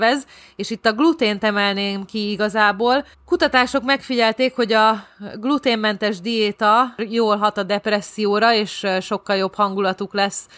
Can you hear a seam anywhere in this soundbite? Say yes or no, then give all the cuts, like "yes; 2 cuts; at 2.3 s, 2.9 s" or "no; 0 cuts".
yes; 1 cut; at 3.1 s